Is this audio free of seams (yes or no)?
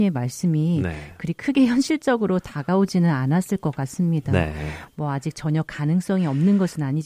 yes